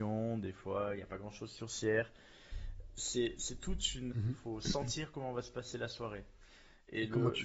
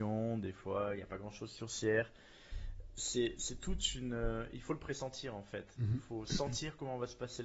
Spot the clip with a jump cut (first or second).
first